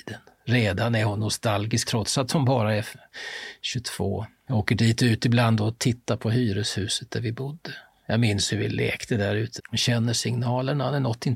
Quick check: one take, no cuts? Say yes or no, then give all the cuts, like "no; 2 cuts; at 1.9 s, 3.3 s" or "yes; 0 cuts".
no; 3 cuts; at 1.8 s, 4.5 s, 9.6 s